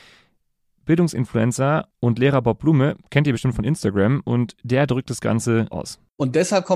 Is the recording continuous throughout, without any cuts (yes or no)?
no